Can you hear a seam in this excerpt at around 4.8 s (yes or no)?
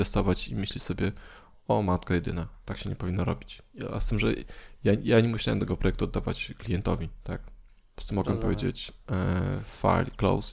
no